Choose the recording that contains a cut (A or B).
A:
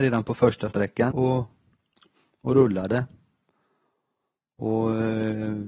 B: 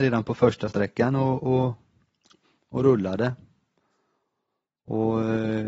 A